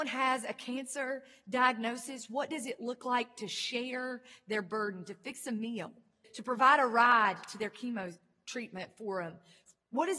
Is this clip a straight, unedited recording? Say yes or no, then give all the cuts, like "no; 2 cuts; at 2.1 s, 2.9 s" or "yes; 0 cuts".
no; 1 cut; at 6.2 s